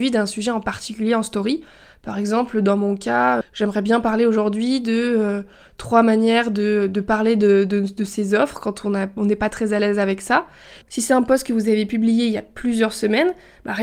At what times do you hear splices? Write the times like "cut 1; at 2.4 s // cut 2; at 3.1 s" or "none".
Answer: cut 1; at 3.4 s // cut 2; at 10.8 s